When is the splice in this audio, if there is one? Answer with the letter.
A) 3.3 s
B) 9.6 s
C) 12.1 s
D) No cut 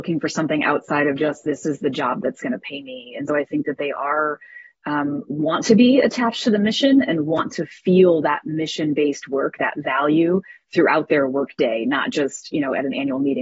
A